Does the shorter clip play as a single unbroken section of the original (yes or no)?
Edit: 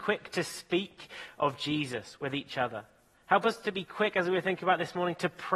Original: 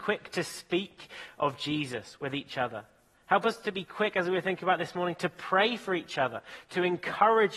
yes